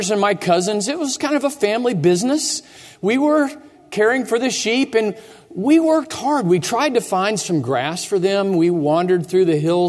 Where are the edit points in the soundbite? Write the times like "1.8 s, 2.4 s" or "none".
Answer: none